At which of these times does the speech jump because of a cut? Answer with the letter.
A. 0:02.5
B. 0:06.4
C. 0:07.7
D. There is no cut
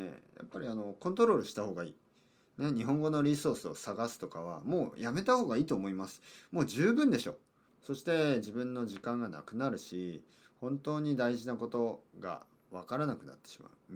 C